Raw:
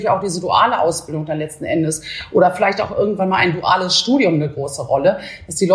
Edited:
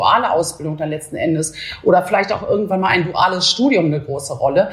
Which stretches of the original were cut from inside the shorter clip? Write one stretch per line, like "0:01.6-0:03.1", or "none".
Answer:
none